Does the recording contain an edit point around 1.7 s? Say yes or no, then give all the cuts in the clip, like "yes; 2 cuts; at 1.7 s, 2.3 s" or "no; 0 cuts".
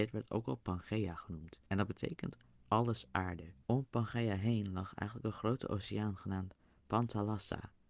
yes; 2 cuts; at 1.7 s, 3.6 s